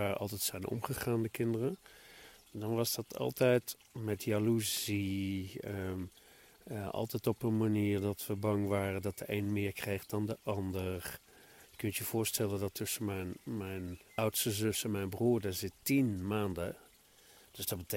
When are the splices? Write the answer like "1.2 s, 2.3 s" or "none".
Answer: 11.6 s, 14.1 s